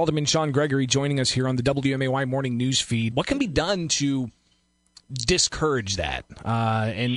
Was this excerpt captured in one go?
no; 1 cut; at 3.1 s

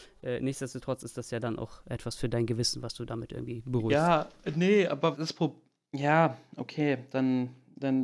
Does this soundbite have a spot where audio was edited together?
yes; 1 cut; at 5.1 s

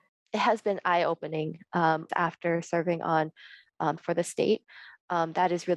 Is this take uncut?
no; 2 cuts; at 2.1 s, 4.0 s

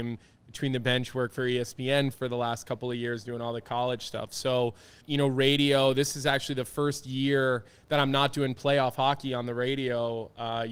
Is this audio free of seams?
no; 1 cut; at 5.0 s

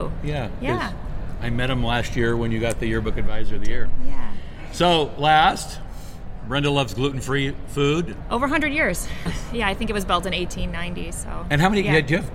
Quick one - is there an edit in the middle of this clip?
yes; 2 cuts; at 8.2 s, 9.3 s

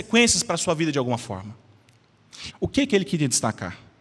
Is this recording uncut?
no; 1 cut; at 2.5 s

